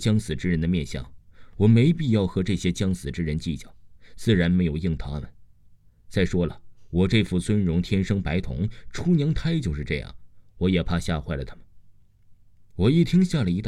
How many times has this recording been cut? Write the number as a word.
zero